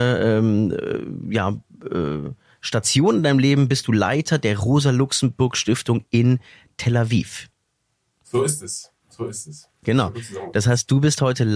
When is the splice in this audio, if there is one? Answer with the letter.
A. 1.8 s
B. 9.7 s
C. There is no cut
C